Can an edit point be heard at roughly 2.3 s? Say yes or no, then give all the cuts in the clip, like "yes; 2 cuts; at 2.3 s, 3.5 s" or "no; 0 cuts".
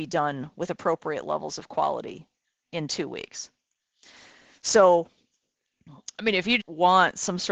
no; 1 cut; at 6.6 s